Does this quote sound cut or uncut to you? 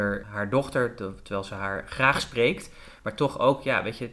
uncut